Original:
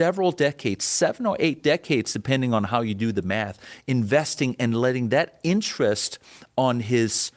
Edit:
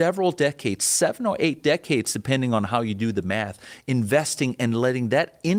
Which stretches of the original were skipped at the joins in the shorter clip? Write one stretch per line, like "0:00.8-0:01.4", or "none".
none